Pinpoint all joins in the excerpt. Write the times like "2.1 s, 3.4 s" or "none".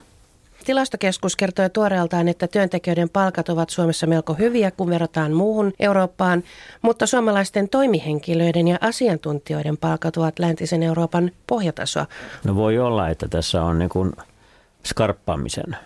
12.4 s